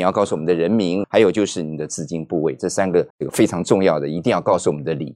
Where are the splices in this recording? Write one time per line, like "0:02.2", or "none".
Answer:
0:01.0
0:03.1